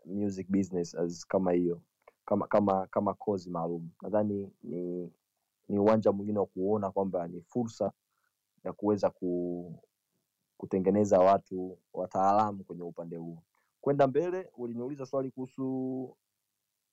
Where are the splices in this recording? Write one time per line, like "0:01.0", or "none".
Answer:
none